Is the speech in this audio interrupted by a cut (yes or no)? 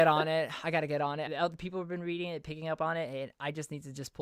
yes